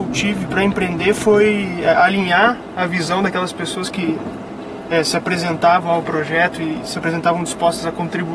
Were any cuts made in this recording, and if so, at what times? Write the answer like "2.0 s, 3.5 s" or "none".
none

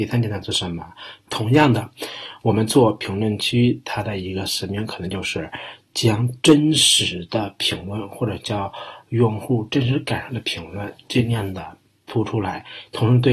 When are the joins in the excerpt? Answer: 1.3 s

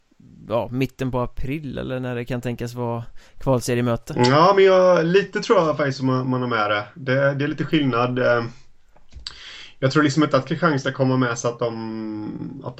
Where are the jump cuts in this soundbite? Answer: none

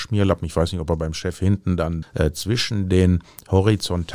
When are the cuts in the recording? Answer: 2.0 s

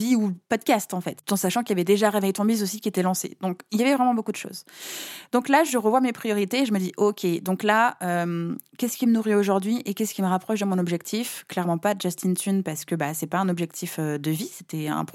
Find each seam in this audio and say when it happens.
none

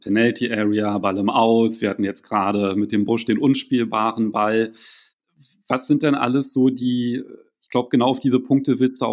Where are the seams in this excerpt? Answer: none

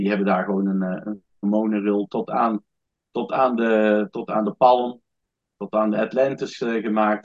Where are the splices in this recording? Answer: 1.4 s

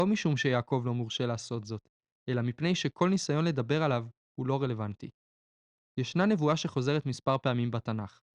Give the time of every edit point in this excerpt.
none

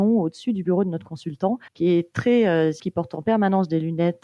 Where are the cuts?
1.7 s, 2.8 s

